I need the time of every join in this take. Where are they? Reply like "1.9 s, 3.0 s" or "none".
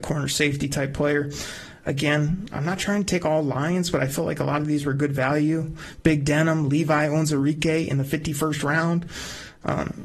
none